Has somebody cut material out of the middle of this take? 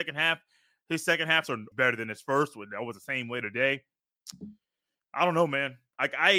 yes; 1 cut; at 1.7 s

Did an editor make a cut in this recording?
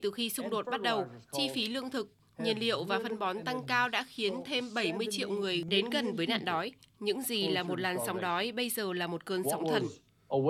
no; 0 cuts

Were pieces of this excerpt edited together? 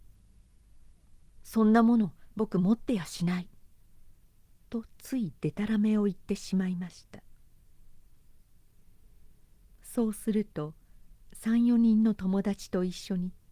no; 0 cuts

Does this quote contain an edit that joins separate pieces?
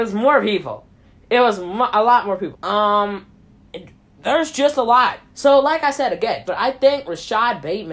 yes; 3 cuts; at 2.5 s, 5.3 s, 6.4 s

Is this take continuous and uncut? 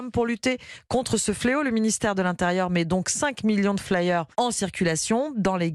no; 1 cut; at 4.3 s

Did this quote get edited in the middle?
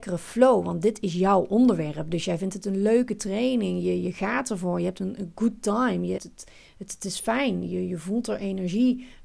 yes; 1 cut; at 6.2 s

